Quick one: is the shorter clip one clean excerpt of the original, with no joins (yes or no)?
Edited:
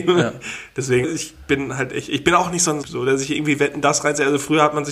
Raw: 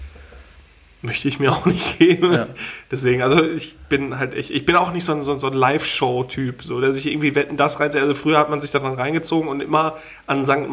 no